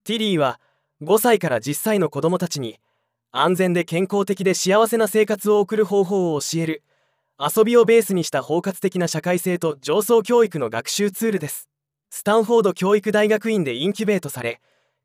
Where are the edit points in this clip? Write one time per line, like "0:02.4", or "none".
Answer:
none